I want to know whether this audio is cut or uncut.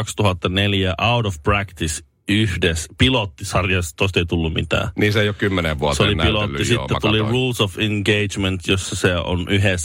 uncut